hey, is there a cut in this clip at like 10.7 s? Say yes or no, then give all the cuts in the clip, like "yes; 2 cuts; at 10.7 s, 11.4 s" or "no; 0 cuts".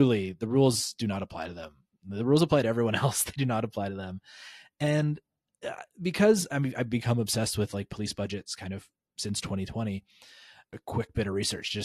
yes; 1 cut; at 10.7 s